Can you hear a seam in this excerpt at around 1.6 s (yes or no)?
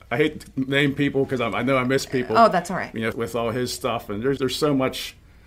no